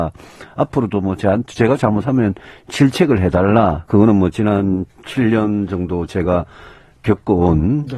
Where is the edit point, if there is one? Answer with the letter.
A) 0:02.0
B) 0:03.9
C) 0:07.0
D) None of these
B